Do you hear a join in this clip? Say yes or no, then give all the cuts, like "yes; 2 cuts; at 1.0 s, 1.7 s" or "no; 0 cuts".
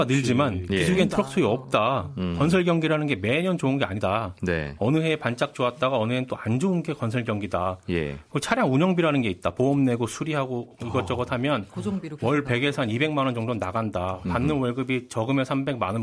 no; 0 cuts